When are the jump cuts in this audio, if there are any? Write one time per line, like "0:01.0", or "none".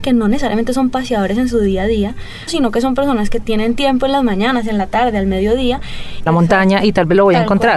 0:02.5
0:06.3